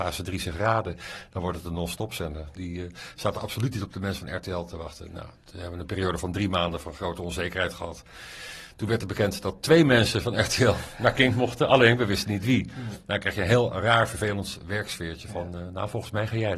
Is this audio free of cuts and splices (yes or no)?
no